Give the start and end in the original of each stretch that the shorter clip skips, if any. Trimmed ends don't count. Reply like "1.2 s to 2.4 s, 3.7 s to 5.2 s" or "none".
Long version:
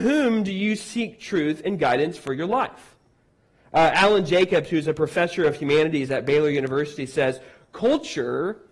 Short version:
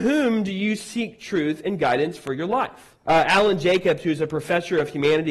3.0 s to 3.7 s